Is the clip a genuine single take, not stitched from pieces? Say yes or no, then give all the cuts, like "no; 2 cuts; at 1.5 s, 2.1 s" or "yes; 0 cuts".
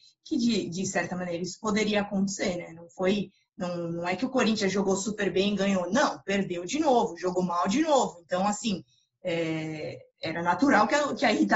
yes; 0 cuts